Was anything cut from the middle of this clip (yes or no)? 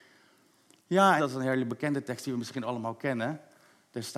yes